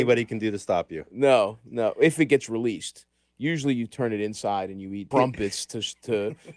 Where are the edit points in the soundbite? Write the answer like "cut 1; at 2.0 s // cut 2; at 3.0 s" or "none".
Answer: cut 1; at 5.1 s